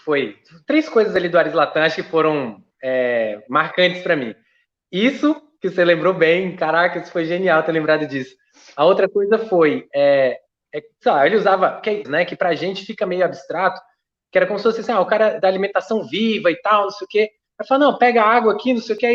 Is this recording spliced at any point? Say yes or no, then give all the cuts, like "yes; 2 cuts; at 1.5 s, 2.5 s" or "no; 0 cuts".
yes; 1 cut; at 12.0 s